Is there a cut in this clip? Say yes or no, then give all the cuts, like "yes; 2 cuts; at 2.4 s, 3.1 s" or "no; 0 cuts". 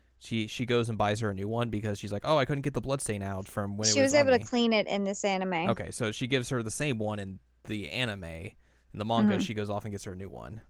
no; 0 cuts